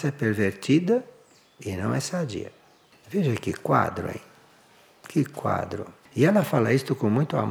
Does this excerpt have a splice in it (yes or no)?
no